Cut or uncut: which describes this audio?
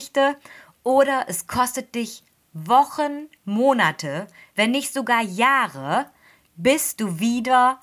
uncut